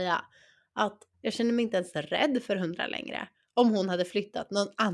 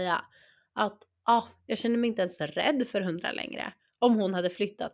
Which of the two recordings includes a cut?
first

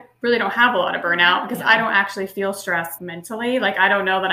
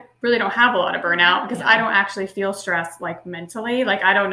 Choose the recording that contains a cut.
first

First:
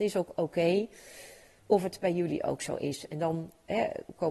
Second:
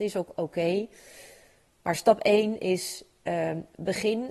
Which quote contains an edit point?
first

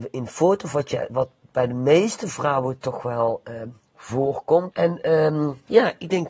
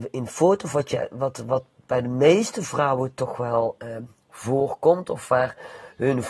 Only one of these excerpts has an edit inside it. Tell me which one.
first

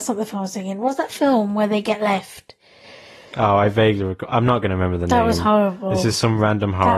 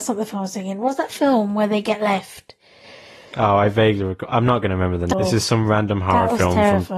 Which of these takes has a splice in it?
second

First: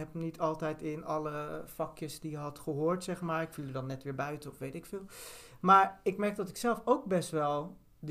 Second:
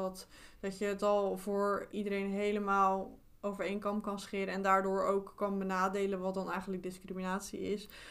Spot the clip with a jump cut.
second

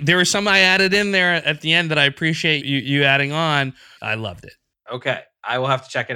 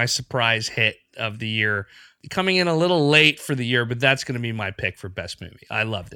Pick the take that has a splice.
first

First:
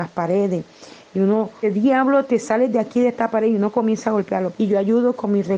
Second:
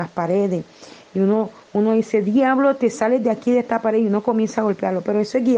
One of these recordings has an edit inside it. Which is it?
first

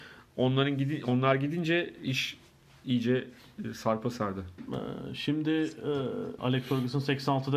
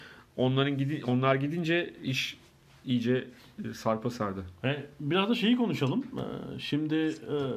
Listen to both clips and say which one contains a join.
first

